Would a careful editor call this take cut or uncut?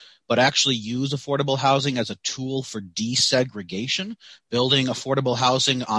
uncut